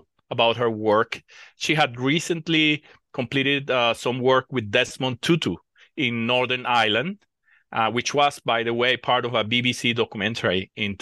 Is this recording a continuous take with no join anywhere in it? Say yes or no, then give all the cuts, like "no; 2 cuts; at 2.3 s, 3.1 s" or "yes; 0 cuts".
yes; 0 cuts